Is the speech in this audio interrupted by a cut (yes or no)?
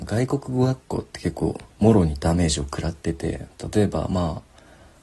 yes